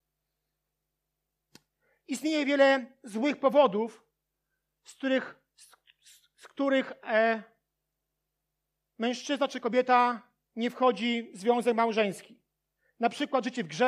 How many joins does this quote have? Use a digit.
0